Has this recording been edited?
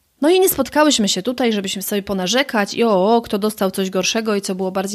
no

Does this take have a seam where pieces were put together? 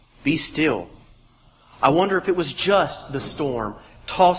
no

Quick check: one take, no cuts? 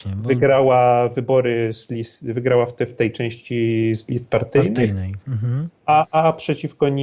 yes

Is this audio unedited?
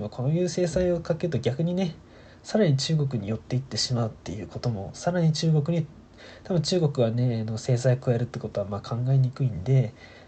yes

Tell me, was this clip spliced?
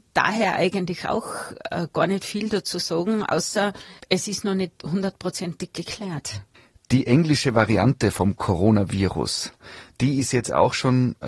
no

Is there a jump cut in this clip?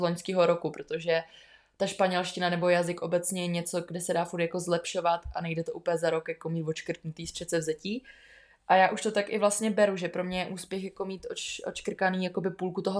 no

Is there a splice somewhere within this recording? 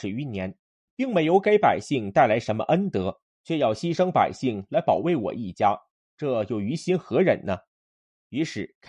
no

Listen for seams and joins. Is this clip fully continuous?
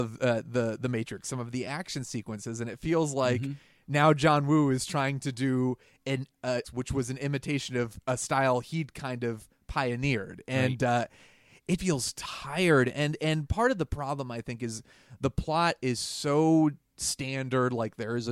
no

